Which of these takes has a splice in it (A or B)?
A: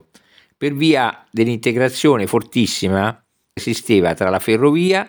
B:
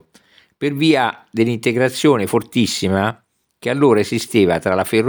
A